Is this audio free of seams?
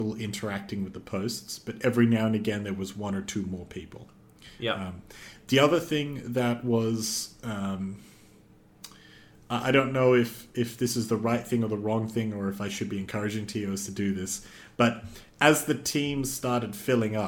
yes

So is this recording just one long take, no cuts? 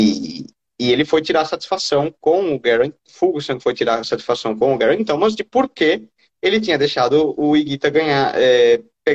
yes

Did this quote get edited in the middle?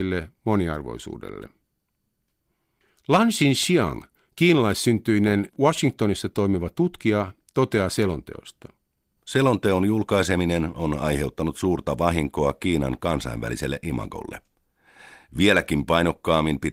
no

